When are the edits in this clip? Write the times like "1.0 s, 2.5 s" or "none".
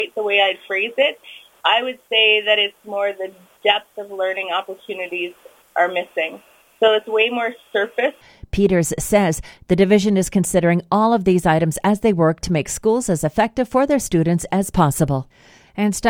none

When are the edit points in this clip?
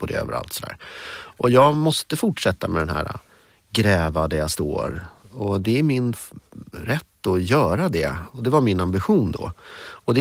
8.3 s

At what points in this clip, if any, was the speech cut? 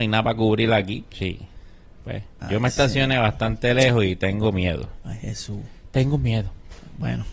1.1 s

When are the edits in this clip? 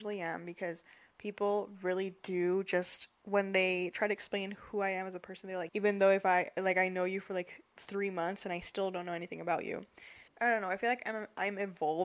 3.2 s, 5.7 s, 10.3 s

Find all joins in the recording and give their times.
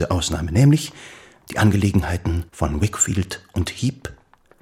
2.5 s

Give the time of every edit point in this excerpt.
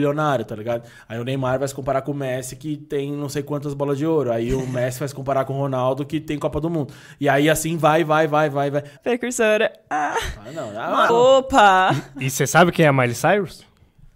9.0 s, 11.1 s

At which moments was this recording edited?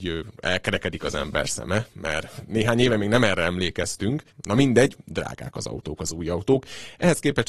4.3 s

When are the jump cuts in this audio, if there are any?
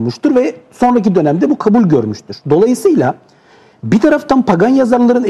none

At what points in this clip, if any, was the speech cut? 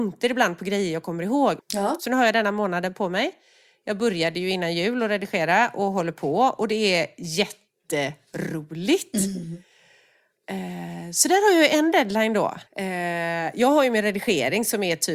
1.6 s, 12.7 s

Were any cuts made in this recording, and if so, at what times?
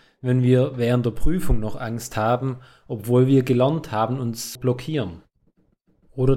4.6 s

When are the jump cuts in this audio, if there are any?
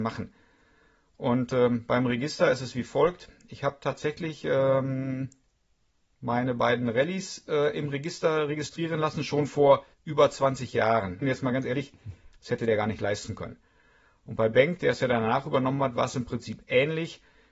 9.9 s, 11.2 s

